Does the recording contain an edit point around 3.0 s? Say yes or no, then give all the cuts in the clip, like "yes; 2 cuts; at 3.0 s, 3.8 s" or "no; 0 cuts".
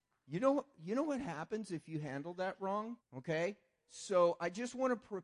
yes; 1 cut; at 3.0 s